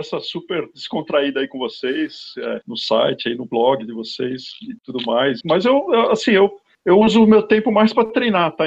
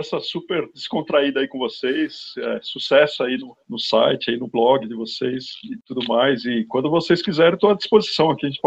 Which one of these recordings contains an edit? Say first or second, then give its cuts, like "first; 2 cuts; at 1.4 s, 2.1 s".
first; 2 cuts; at 2.6 s, 5.4 s